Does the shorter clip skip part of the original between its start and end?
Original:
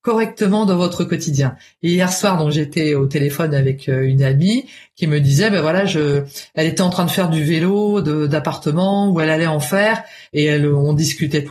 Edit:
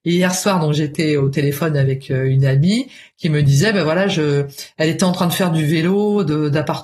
no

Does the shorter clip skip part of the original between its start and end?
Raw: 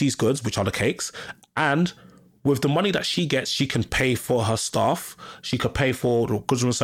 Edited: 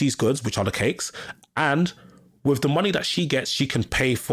no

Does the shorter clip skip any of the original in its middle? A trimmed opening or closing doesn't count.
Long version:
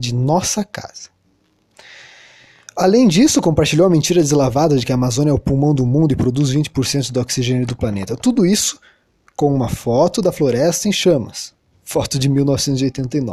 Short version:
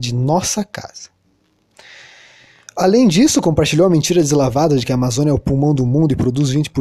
no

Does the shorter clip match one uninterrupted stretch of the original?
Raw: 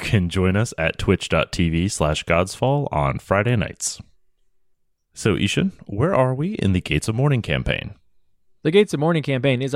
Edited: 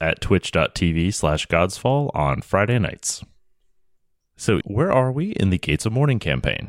no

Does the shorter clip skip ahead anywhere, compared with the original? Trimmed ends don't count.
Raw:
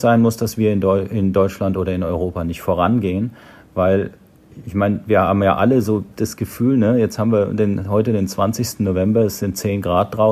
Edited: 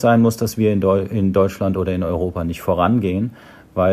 no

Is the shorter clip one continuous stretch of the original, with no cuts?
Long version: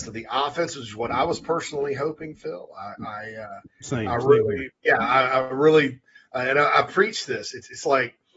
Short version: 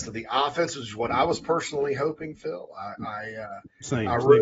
yes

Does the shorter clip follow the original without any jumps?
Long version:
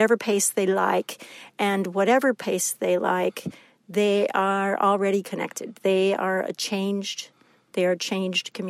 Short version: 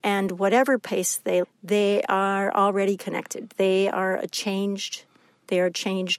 no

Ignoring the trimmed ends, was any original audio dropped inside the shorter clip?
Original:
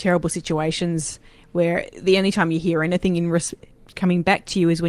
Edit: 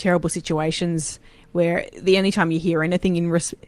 no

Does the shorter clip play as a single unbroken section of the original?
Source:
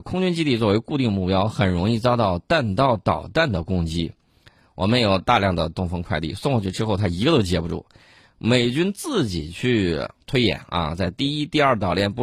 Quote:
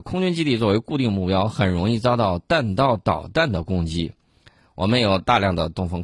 yes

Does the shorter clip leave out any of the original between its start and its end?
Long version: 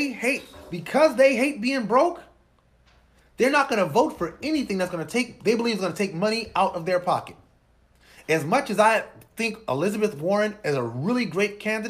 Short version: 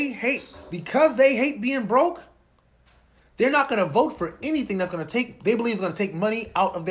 no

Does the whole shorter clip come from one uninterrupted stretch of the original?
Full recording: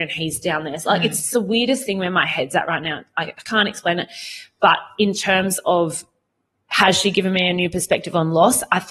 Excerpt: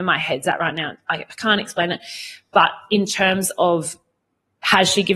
yes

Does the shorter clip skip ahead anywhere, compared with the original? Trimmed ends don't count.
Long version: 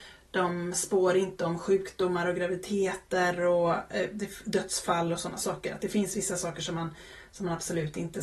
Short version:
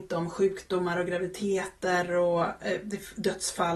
no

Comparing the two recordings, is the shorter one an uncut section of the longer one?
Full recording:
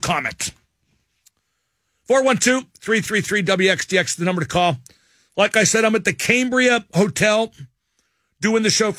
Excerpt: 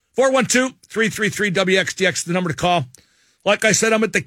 yes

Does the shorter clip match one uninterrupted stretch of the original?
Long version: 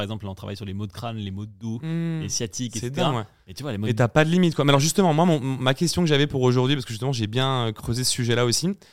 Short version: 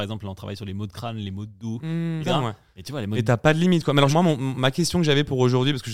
no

